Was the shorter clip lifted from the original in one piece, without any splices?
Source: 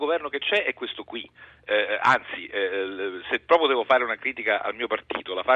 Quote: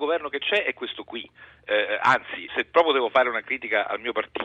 no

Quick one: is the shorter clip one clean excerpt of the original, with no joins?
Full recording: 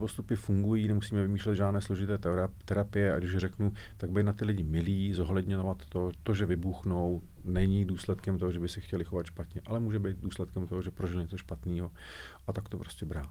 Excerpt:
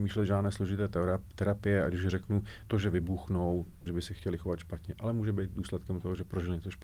no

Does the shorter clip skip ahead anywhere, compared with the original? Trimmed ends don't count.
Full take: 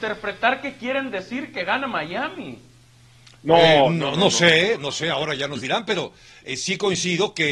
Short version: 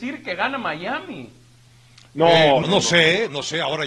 yes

